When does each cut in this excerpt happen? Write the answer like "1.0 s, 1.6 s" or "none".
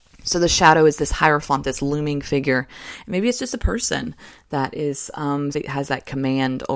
5.5 s